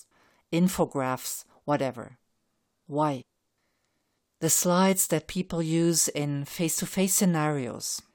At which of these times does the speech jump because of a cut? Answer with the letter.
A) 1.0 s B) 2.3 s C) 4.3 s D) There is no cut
D